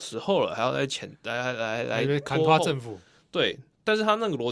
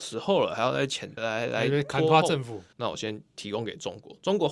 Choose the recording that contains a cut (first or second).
second